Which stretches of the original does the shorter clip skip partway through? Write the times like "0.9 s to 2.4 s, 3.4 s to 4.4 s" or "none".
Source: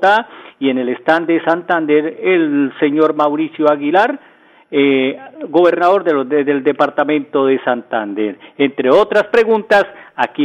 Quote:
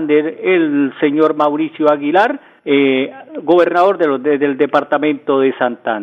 4.4 s to 4.7 s